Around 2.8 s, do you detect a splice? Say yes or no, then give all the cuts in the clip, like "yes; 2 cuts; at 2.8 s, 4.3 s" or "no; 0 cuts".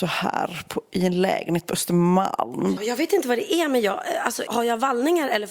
yes; 2 cuts; at 2.8 s, 4.5 s